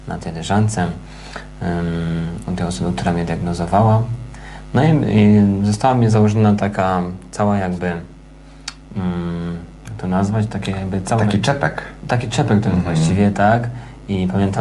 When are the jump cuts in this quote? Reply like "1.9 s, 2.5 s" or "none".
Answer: none

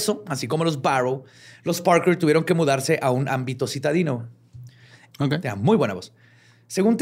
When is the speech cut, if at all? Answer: 5.1 s

